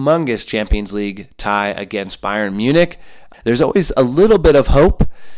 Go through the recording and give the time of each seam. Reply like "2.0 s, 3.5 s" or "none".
3.3 s